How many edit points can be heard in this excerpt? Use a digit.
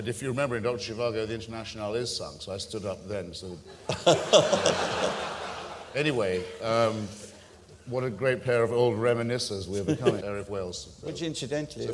1